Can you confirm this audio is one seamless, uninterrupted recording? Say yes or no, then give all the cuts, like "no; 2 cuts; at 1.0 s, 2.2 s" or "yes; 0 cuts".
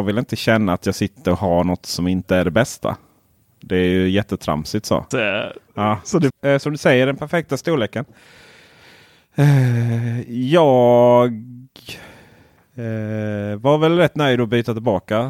no; 2 cuts; at 5.1 s, 6.3 s